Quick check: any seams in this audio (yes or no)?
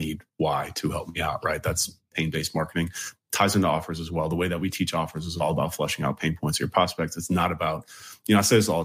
no